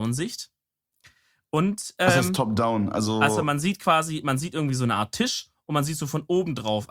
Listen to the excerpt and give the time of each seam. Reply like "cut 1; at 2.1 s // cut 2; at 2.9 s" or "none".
none